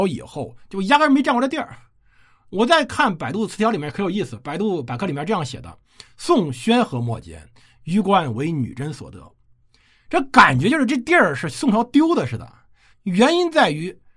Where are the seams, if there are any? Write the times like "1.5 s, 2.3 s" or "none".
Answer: 12.9 s